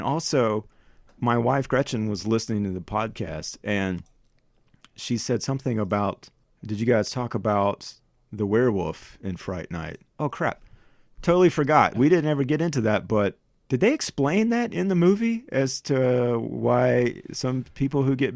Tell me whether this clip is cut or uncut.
cut